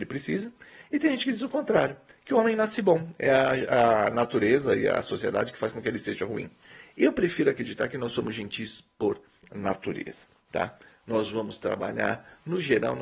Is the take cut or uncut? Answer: uncut